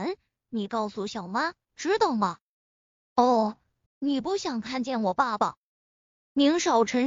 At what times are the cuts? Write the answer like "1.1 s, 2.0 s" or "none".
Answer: 1.7 s, 3.9 s

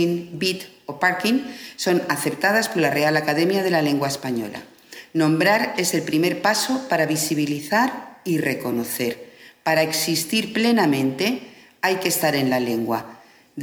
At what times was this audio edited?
none

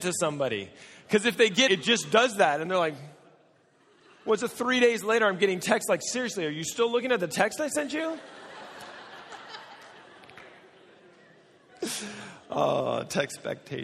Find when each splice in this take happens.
1.7 s

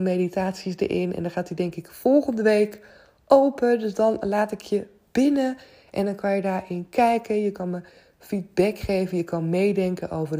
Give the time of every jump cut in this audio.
none

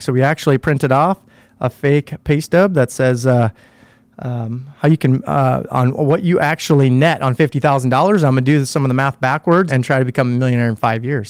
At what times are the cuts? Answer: 9.7 s

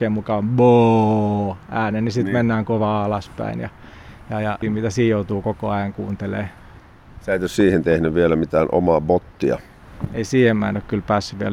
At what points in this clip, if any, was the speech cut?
4.6 s

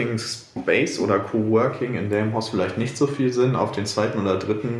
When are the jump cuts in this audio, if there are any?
none

